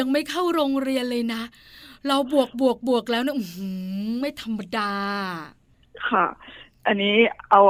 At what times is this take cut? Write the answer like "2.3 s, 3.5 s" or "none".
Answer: none